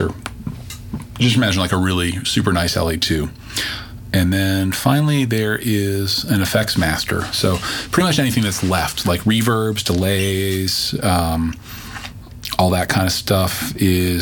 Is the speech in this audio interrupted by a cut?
no; 0 cuts

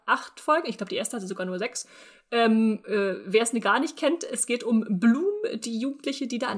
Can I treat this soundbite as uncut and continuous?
yes; 0 cuts

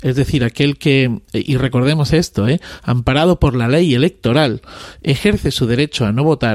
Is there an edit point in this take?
no; 0 cuts

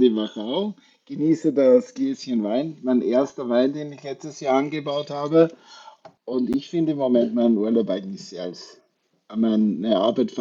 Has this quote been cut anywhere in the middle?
yes; 1 cut; at 6.2 s

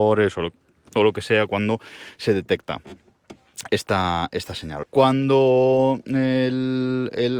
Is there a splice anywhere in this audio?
yes; 1 cut; at 4.8 s

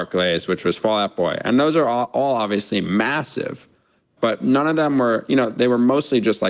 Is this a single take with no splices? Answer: no; 1 cut; at 4.2 s

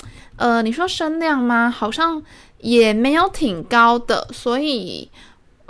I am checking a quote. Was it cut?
no; 0 cuts

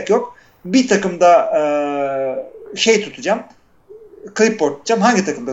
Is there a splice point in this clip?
no; 0 cuts

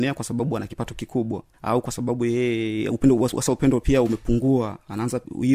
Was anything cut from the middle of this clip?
no; 0 cuts

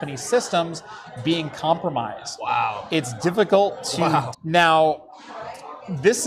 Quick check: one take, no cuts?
no; 1 cut; at 4.3 s

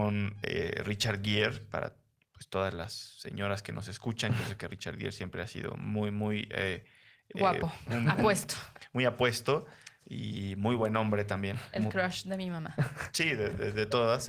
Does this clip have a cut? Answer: no; 0 cuts

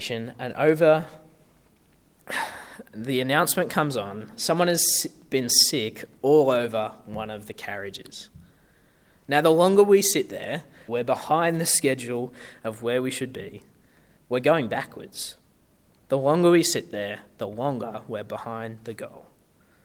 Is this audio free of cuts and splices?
no; 1 cut; at 10.9 s

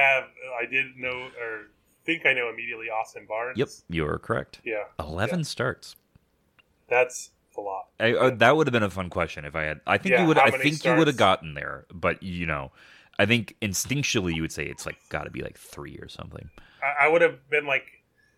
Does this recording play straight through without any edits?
yes; 0 cuts

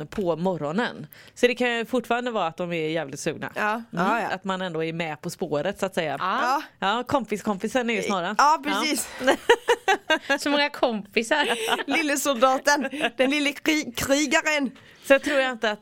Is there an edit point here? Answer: yes; 1 cut; at 6.2 s

